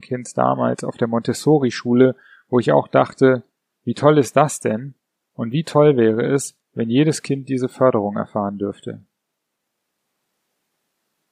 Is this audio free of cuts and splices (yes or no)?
yes